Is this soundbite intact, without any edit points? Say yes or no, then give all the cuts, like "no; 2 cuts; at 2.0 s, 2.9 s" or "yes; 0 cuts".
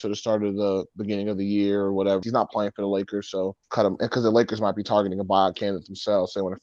no; 2 cuts; at 2.2 s, 3.6 s